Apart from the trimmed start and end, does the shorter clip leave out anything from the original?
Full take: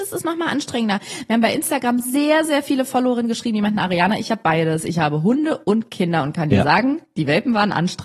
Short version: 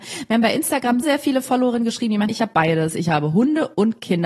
yes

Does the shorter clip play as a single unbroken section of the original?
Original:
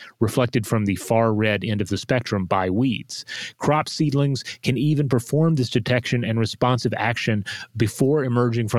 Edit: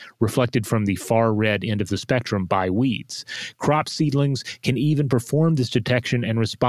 yes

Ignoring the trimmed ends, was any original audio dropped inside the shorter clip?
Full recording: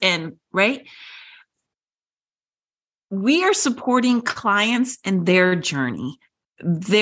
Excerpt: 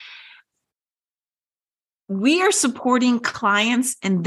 no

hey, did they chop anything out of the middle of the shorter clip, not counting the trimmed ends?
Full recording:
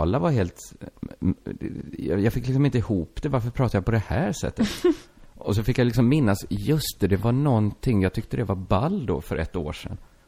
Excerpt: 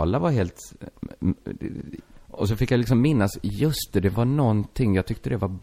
yes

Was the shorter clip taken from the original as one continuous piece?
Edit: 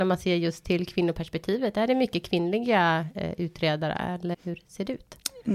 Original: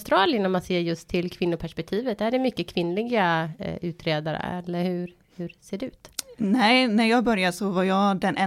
no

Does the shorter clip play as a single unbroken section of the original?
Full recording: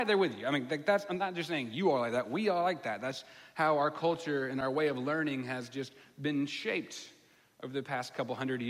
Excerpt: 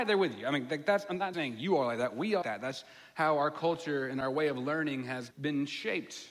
no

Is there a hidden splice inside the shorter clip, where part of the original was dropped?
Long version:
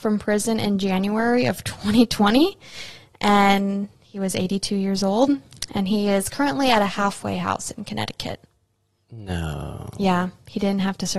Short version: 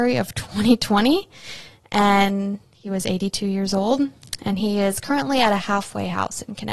no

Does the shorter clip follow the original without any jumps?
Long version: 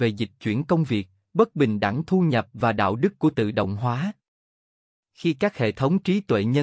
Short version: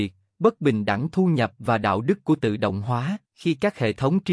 no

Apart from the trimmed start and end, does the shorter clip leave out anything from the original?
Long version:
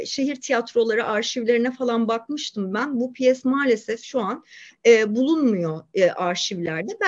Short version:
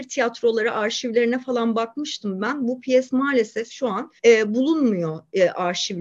yes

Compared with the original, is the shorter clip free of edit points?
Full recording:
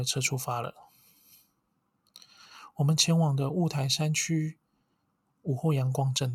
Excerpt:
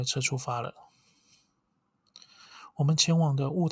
yes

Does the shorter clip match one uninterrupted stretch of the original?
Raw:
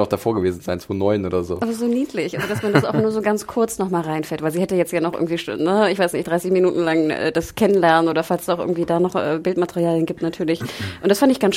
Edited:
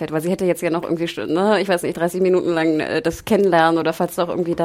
yes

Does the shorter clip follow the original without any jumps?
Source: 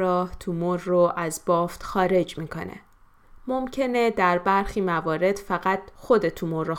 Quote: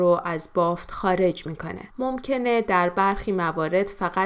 no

